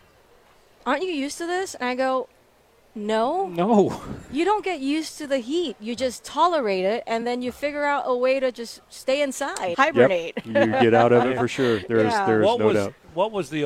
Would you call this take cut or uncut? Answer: cut